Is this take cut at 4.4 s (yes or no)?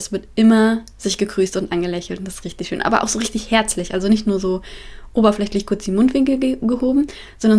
no